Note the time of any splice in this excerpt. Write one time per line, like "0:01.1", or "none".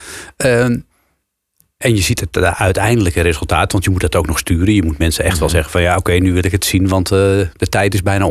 none